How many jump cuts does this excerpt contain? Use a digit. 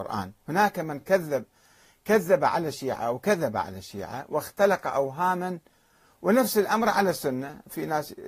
0